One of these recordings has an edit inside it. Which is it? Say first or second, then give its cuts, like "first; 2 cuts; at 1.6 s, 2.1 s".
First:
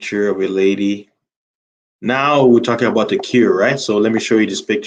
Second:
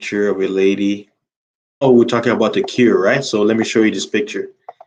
second; 1 cut; at 1.8 s